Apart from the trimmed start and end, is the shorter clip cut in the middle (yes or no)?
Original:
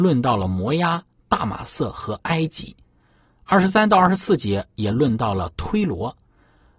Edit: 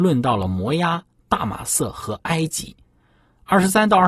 no